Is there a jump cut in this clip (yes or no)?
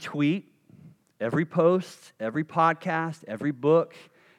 no